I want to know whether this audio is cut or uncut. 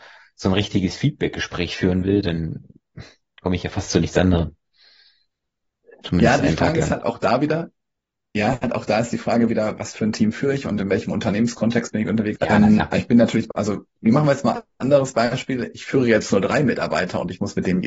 cut